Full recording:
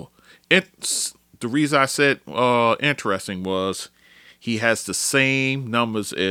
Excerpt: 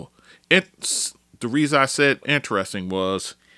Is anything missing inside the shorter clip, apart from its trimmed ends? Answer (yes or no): yes